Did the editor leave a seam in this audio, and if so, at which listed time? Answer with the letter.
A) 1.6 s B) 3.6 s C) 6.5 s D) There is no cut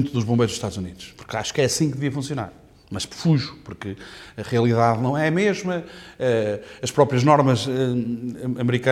D